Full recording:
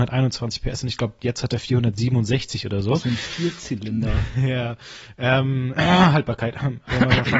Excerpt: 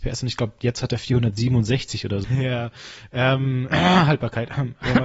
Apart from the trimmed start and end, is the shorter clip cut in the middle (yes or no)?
yes